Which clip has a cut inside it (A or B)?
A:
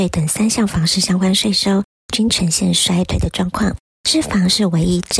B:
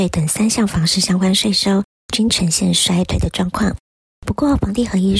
A